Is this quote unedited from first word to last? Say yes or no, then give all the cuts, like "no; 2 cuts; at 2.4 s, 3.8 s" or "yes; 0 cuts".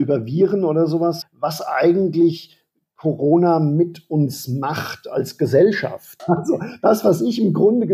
no; 2 cuts; at 1.2 s, 6.2 s